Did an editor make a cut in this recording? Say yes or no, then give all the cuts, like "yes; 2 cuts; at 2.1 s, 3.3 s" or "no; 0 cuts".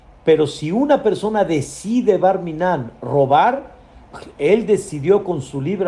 no; 0 cuts